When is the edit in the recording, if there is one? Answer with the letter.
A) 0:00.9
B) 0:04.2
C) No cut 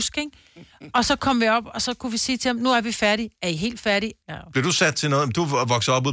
B